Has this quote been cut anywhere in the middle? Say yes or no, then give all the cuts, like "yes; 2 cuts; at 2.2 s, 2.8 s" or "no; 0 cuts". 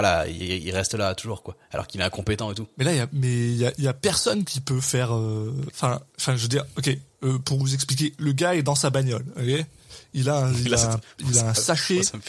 no; 0 cuts